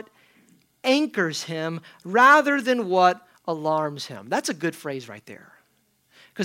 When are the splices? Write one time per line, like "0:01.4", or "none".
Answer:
none